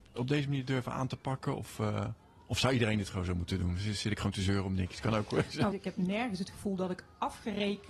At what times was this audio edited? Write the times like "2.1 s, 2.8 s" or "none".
5.7 s